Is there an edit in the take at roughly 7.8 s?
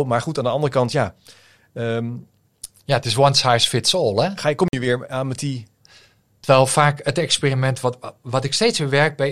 no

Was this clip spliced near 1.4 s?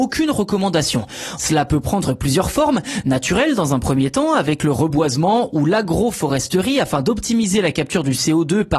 yes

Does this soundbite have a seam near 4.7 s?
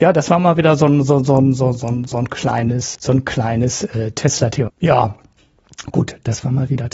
yes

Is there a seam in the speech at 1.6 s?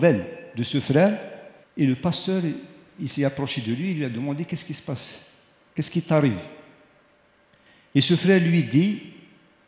yes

